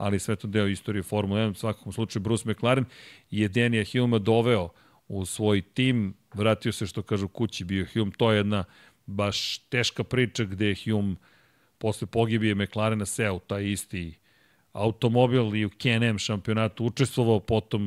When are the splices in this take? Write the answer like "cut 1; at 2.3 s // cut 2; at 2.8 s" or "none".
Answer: none